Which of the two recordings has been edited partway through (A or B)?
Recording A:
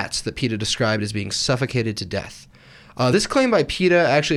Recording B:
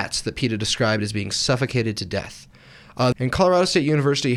B